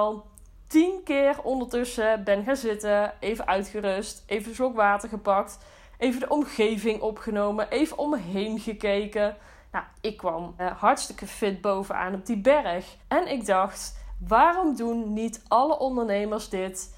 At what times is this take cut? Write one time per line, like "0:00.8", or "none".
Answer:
0:10.6
0:13.0